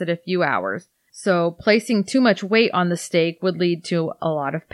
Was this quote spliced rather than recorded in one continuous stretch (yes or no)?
yes